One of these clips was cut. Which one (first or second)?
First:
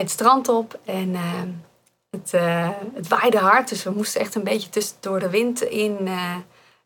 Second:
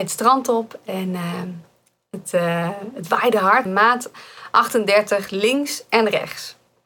second